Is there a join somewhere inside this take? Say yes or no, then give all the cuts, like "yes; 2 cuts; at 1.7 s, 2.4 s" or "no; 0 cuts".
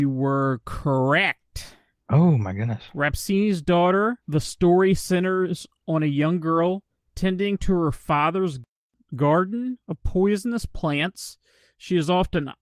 yes; 1 cut; at 4.2 s